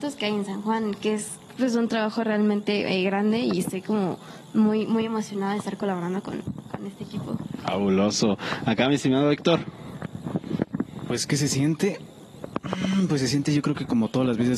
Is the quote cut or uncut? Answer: uncut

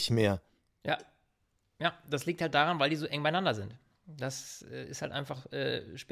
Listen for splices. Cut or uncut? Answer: uncut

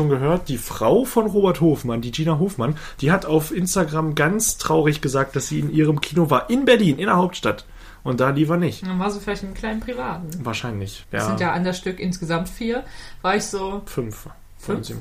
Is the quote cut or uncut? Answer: cut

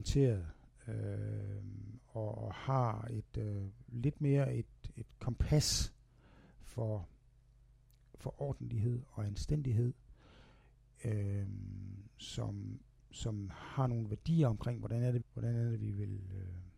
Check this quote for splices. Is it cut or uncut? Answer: cut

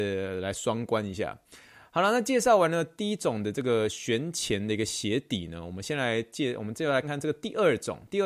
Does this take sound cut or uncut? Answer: cut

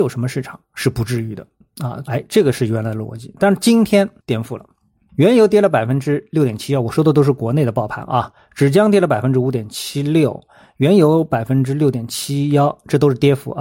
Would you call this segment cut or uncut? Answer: cut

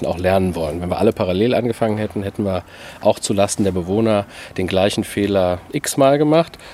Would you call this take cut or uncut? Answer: uncut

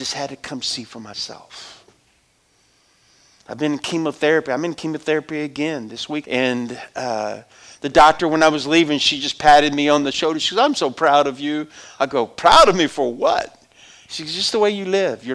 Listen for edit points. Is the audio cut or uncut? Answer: cut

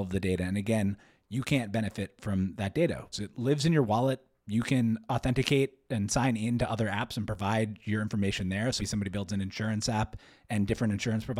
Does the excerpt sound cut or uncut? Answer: cut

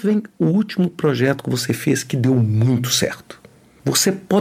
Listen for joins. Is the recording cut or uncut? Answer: uncut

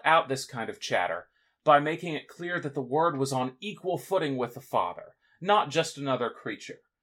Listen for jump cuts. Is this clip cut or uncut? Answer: uncut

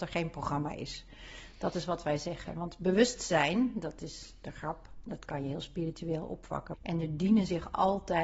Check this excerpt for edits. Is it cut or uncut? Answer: cut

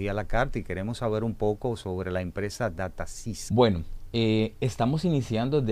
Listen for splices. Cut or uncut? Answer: cut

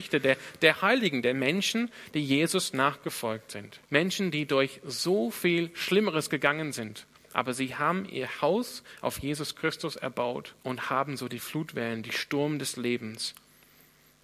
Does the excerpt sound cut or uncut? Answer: cut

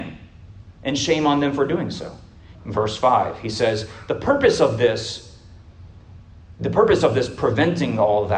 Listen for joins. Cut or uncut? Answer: cut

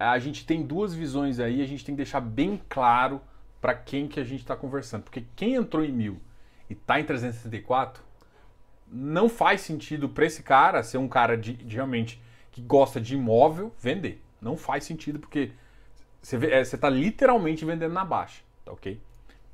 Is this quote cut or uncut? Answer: uncut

